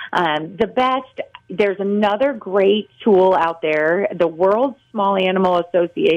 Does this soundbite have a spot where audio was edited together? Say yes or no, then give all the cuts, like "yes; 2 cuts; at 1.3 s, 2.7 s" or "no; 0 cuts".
no; 0 cuts